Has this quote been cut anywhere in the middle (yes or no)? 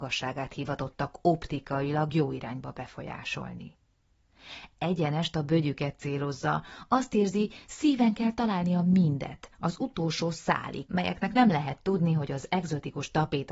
yes